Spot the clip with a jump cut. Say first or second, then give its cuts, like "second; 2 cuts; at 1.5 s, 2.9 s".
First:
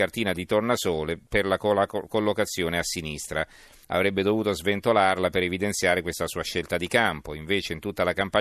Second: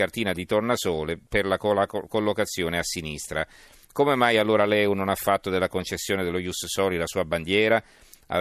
first; 1 cut; at 3.8 s